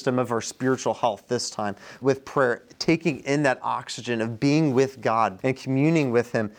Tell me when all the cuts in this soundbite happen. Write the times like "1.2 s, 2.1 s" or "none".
2.0 s, 5.4 s